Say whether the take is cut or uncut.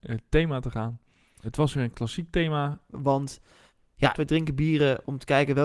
cut